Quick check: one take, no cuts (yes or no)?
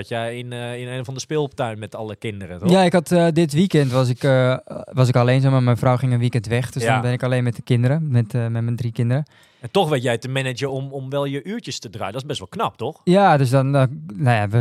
yes